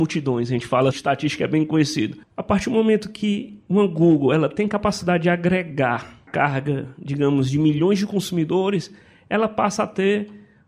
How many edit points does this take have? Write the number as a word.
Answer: one